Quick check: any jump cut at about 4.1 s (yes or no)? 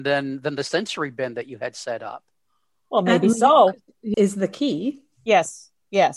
yes